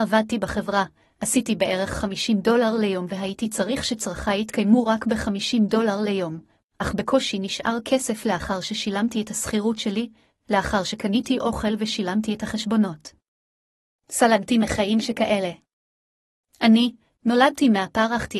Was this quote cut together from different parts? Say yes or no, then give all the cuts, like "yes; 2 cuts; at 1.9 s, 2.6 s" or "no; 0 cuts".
yes; 1 cut; at 17.1 s